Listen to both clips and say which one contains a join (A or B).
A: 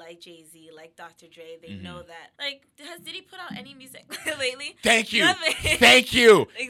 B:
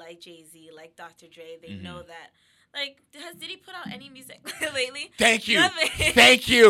A